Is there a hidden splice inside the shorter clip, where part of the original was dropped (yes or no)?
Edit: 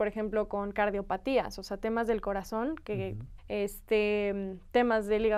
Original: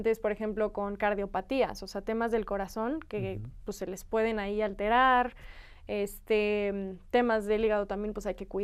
yes